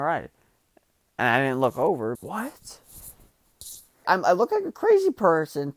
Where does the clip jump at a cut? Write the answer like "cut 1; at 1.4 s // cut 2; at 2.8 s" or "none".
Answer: cut 1; at 2.1 s // cut 2; at 4.0 s